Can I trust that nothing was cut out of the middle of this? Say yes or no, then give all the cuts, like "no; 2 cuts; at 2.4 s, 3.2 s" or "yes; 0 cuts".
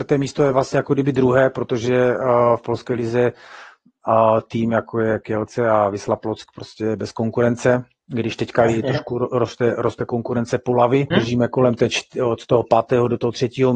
no; 1 cut; at 11.1 s